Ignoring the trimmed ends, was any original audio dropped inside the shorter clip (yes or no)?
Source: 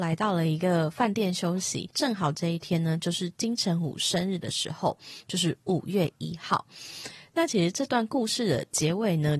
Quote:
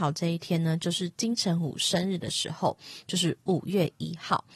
no